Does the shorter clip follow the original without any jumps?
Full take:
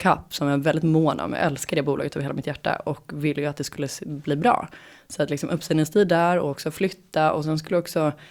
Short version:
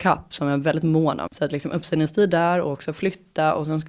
no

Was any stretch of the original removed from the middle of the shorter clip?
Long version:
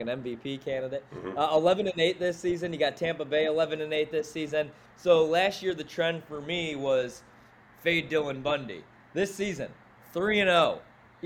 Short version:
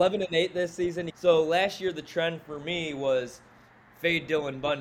yes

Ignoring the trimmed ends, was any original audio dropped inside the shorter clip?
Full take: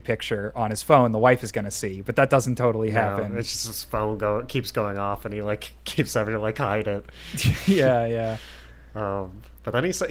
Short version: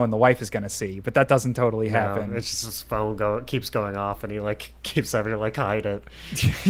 no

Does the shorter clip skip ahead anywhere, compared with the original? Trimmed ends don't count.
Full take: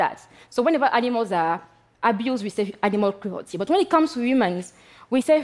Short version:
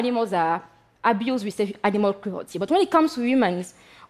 no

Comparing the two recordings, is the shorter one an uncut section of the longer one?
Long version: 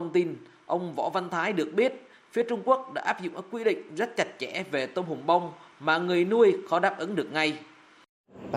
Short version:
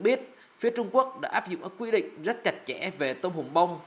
yes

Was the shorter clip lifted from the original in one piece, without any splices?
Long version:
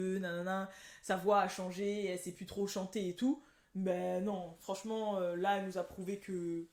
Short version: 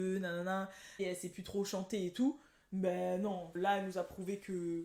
no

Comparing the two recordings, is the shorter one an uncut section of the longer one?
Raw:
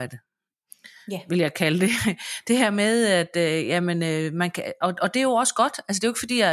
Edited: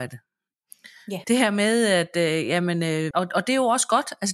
no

